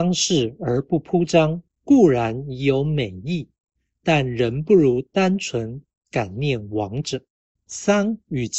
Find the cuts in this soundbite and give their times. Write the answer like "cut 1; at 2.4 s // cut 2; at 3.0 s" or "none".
cut 1; at 7.6 s